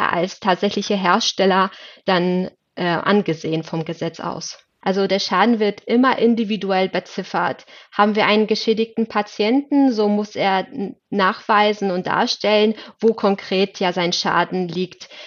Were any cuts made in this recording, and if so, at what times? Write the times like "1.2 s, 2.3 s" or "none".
4.8 s